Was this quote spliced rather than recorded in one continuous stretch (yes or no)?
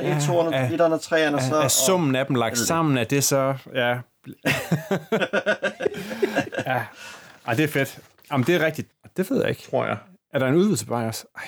yes